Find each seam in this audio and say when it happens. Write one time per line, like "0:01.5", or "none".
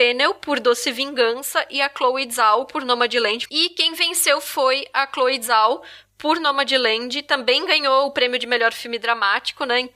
0:03.4

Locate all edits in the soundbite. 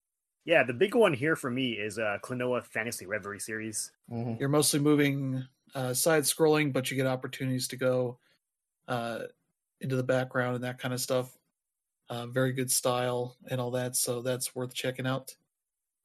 0:04.0

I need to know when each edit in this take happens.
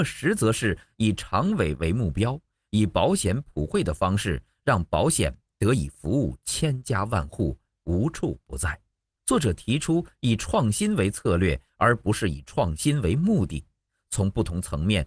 0:09.2

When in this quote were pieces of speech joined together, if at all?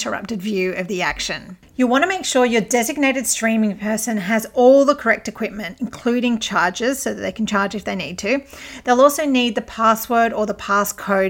none

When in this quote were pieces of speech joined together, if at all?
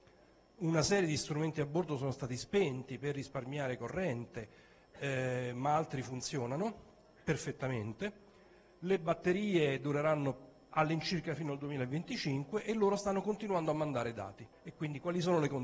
0:14.5

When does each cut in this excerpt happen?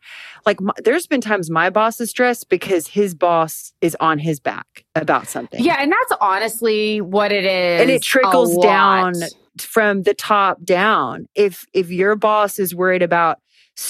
none

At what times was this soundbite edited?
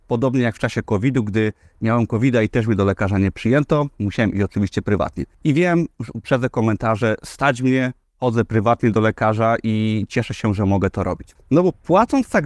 0:05.3
0:11.4

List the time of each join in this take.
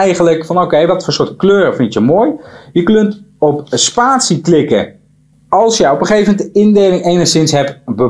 0:05.3

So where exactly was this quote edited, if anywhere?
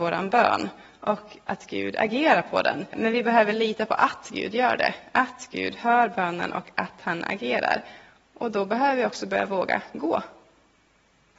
0:02.9

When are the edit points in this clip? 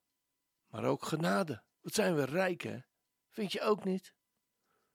0:01.7

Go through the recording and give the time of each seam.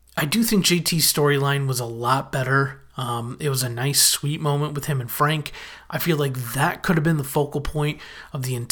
none

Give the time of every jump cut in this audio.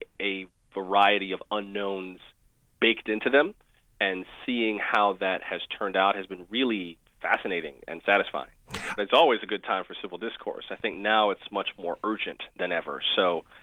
0:09.0

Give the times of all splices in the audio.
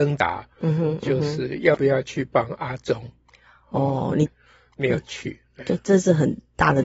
0:04.3

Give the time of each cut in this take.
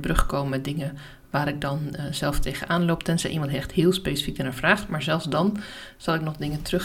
none

